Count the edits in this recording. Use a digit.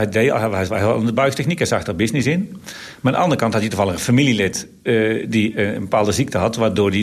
0